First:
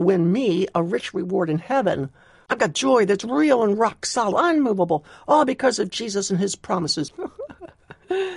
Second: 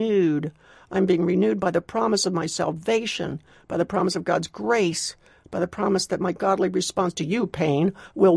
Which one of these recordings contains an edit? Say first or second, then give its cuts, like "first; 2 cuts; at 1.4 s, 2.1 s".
first; 3 cuts; at 2.5 s, 4.3 s, 7.1 s